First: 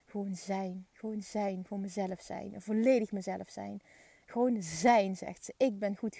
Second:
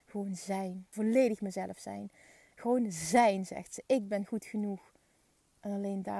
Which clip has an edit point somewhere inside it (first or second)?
second